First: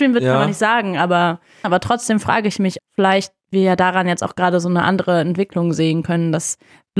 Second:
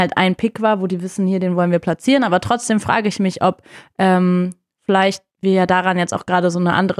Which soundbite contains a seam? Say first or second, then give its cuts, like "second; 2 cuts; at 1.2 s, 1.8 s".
first; 2 cuts; at 1.6 s, 2.8 s